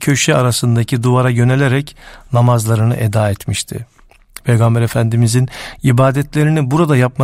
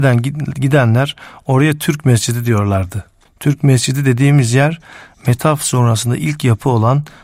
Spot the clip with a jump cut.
second; 1 cut; at 3.3 s

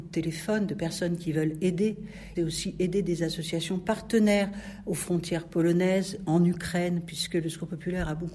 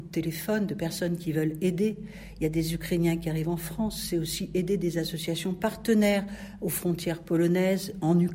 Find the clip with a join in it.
first; 1 cut; at 2.3 s

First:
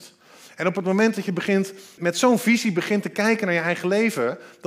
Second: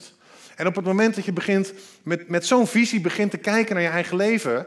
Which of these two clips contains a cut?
first; 1 cut; at 2.0 s

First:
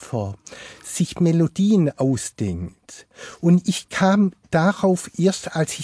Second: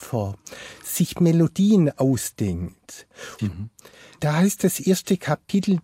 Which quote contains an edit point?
second; 1 cut; at 3.4 s

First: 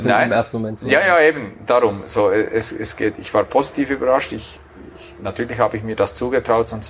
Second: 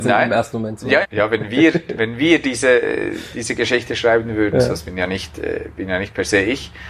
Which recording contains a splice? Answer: second; 1 cut; at 1.0 s

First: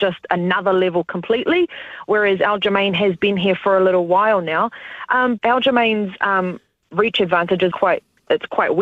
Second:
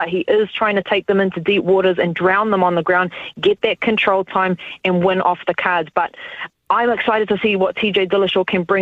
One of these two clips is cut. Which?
first; 2 cuts; at 5.4 s, 7.7 s

